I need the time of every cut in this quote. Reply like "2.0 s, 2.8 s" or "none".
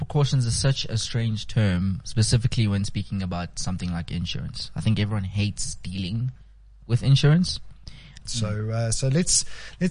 8.2 s